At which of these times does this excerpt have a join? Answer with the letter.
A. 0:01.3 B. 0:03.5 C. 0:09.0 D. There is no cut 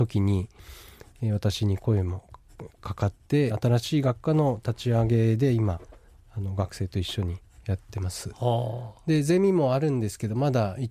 B